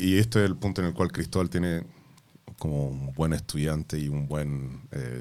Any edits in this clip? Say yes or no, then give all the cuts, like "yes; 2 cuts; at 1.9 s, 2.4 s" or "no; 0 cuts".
no; 0 cuts